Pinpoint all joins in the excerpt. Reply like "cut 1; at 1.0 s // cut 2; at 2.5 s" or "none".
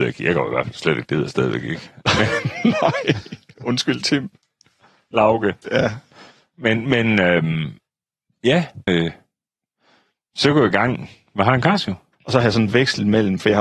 cut 1; at 5.6 s // cut 2; at 8.9 s // cut 3; at 12.1 s